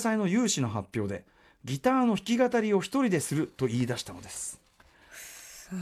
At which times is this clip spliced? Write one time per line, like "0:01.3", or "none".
none